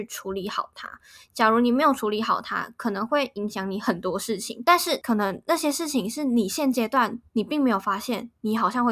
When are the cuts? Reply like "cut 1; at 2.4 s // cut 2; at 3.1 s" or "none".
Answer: none